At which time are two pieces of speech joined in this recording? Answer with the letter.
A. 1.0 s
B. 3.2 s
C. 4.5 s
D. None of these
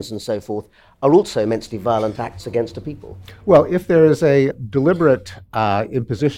C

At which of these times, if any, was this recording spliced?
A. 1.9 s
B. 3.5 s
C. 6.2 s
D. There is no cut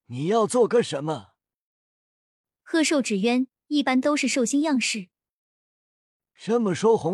D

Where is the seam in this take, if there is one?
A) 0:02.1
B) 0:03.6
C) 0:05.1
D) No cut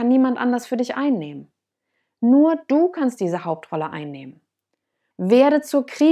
C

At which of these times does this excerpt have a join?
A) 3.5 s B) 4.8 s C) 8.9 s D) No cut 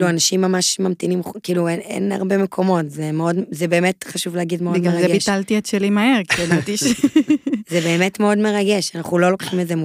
D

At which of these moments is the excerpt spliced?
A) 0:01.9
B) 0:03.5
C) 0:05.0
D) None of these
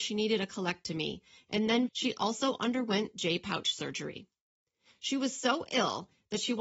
A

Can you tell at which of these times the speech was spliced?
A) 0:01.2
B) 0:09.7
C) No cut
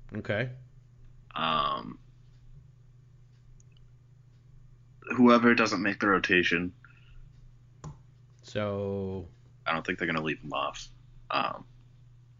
B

